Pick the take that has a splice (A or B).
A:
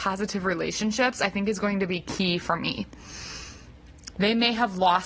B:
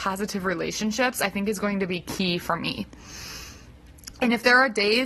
A